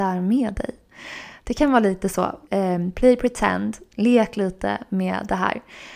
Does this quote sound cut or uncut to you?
cut